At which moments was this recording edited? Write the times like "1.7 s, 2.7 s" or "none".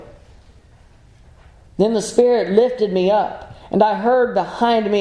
1.7 s